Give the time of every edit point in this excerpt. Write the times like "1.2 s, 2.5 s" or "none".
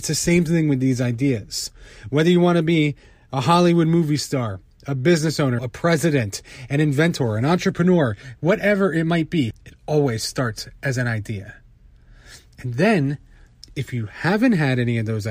5.6 s, 9.5 s